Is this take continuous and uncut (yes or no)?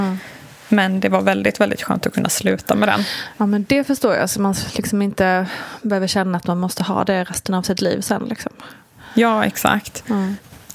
yes